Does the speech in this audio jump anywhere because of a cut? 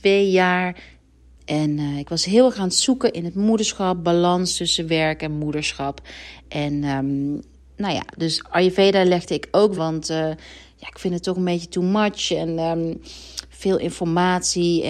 yes; 2 cuts; at 1.4 s, 9.7 s

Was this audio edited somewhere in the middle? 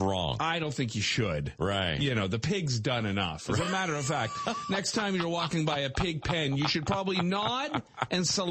no; 0 cuts

